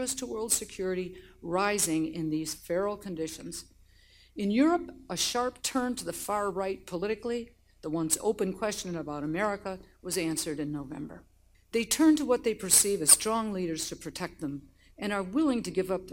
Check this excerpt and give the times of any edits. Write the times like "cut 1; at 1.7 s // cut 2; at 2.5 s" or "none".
cut 1; at 11.5 s